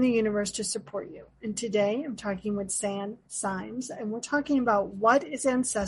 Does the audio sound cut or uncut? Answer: uncut